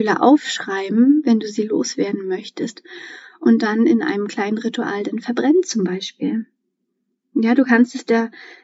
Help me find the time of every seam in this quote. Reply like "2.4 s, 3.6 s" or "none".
none